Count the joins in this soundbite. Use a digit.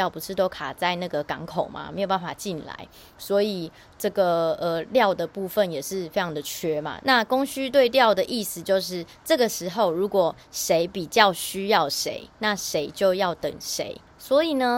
1